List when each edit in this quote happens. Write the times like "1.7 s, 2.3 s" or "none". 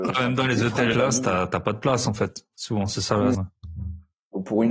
0.9 s, 3.3 s

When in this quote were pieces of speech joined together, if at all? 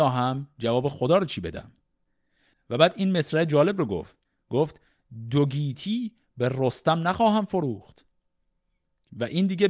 none

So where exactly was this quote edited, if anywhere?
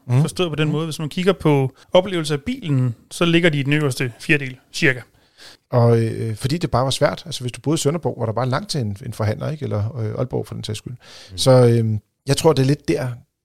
1.8 s, 5.6 s

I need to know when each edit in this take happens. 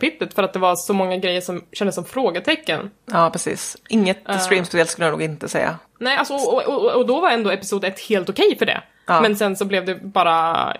none

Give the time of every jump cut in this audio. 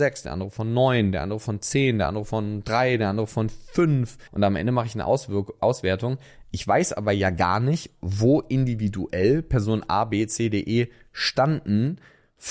4.3 s

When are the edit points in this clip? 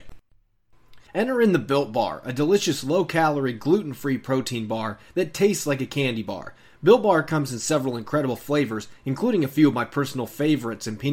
1.1 s

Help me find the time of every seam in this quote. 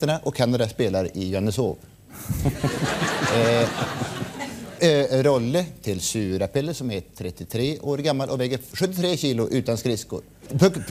none

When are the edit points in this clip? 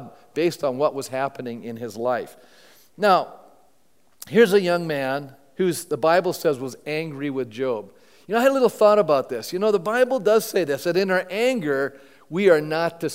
none

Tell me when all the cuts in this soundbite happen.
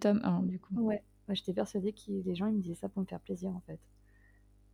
none

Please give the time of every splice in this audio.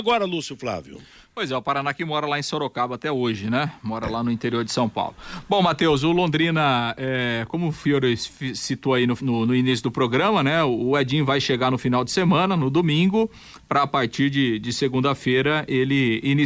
9.2 s

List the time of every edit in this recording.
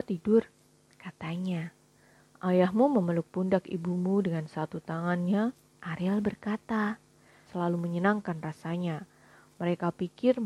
5.7 s, 7.5 s

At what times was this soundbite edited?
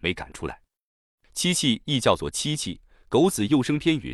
none

